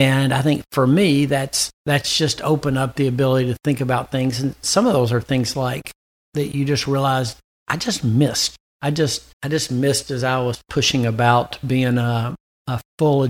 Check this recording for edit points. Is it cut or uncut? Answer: cut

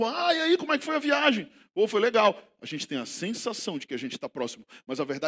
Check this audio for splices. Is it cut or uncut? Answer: uncut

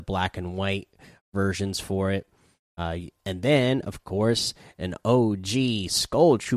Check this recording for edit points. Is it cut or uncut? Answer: uncut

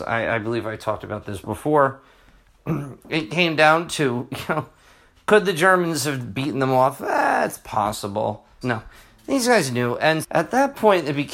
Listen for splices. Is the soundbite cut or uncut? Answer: cut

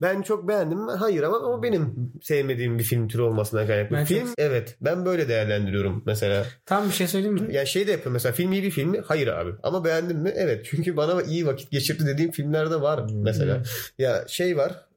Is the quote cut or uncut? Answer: cut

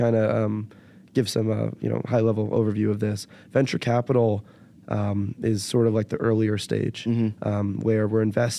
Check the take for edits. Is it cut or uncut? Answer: uncut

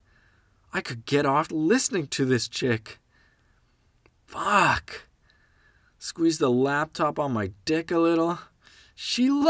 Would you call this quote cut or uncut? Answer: cut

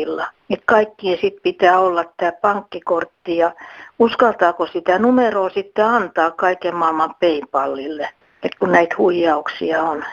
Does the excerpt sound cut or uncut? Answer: uncut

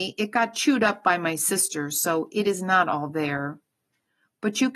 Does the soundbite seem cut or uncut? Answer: uncut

